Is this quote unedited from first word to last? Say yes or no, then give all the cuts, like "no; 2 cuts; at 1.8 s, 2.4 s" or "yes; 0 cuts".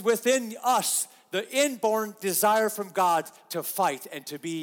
yes; 0 cuts